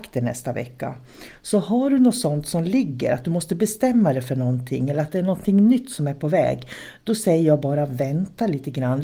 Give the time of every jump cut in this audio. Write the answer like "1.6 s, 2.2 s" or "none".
none